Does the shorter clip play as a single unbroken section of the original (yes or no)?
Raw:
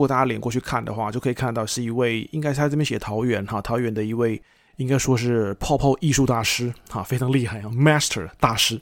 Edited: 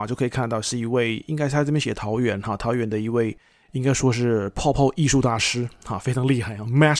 yes